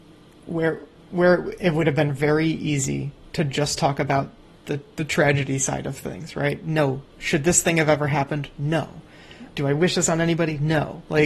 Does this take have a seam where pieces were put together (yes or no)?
no